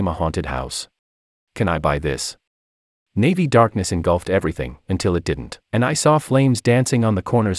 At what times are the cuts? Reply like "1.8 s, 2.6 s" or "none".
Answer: 1.4 s, 3.0 s, 5.6 s